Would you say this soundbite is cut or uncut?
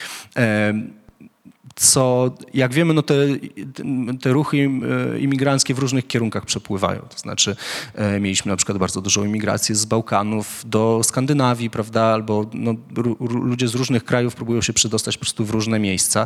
uncut